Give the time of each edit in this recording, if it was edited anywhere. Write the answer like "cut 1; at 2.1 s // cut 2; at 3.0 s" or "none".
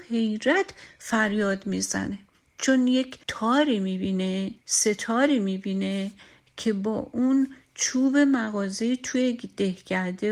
cut 1; at 3.2 s // cut 2; at 4.6 s